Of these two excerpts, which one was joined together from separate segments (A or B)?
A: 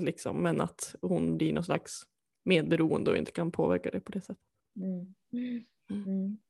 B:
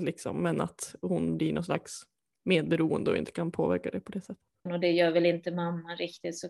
B